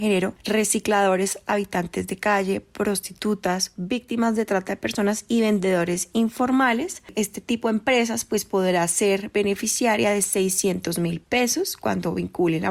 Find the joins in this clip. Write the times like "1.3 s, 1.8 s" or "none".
none